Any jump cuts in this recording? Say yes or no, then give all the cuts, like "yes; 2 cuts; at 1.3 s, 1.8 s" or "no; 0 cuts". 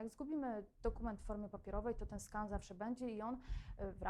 no; 0 cuts